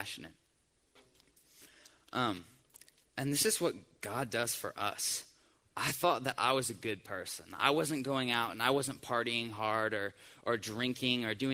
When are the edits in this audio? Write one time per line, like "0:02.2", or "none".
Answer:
0:05.6